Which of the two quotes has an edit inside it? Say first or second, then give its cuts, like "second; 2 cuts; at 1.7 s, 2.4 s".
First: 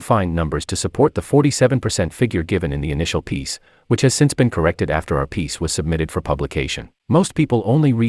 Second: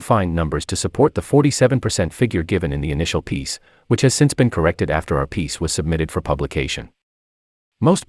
first; 1 cut; at 7.0 s